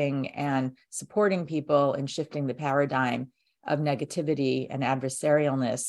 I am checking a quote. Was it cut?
no; 0 cuts

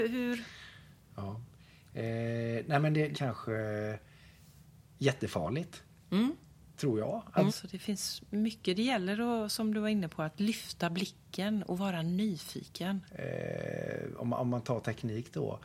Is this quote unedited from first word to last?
no; 3 cuts; at 3.1 s, 7.5 s, 13.1 s

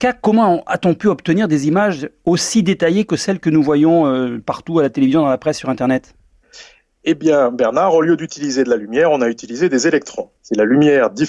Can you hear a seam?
yes; 1 cut; at 10.4 s

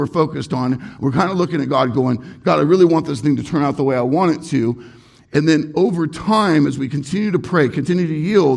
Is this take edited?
no; 0 cuts

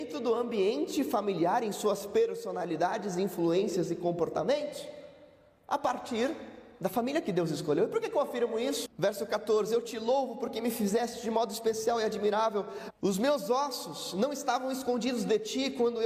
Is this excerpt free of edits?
no; 2 cuts; at 8.9 s, 12.9 s

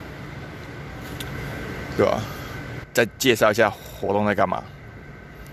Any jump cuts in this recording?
yes; 1 cut; at 2.8 s

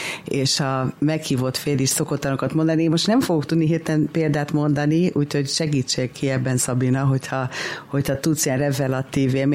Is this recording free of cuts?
yes; 0 cuts

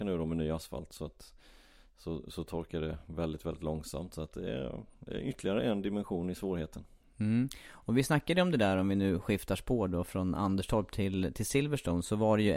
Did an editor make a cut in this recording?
no; 0 cuts

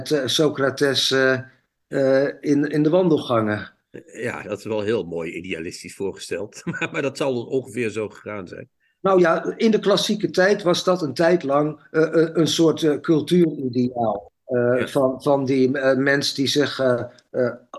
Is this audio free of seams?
yes; 0 cuts

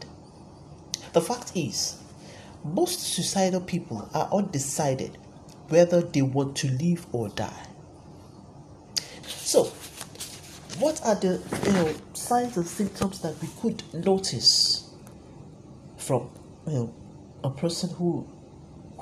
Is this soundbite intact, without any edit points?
no; 2 cuts; at 1.1 s, 9.2 s

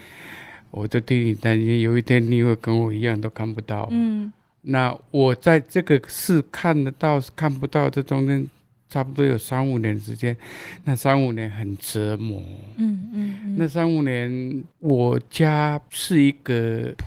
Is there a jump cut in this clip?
no; 0 cuts

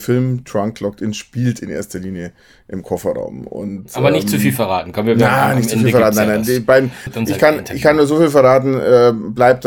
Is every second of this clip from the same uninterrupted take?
no; 1 cut; at 7.1 s

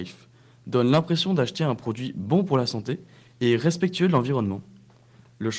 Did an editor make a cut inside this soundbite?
no; 0 cuts

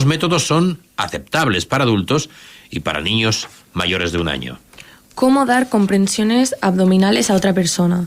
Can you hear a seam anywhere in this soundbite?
no; 0 cuts

